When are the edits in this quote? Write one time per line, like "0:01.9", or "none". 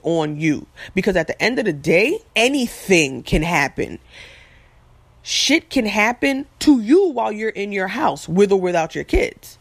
0:02.3